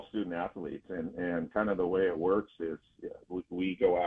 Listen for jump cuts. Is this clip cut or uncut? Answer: uncut